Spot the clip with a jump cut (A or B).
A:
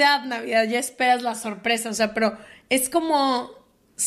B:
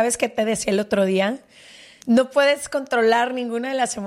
B